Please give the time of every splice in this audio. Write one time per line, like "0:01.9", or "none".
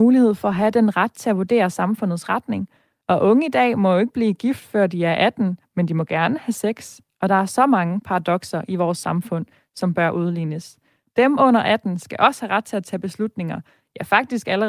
none